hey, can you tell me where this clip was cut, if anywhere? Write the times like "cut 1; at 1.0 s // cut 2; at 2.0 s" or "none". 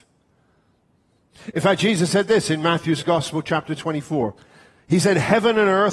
none